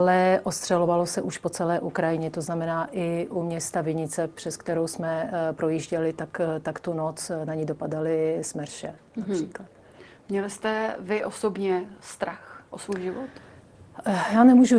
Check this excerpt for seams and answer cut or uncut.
uncut